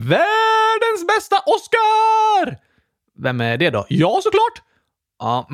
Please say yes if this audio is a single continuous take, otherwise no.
yes